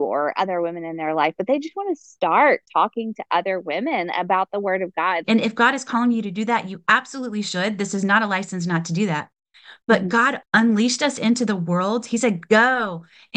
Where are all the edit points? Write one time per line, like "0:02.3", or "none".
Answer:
0:05.2
0:10.4